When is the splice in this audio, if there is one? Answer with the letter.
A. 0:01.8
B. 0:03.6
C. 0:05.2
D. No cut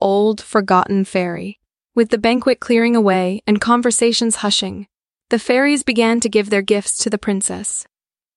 A